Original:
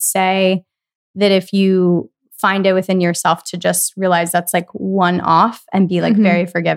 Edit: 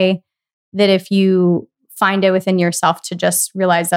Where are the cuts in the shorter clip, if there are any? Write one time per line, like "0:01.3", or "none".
none